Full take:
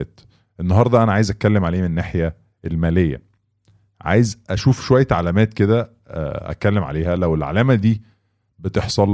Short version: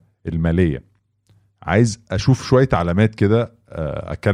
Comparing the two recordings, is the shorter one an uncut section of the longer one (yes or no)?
yes